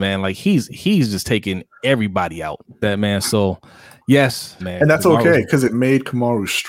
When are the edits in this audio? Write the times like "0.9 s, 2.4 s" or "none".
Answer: 2.8 s, 4.6 s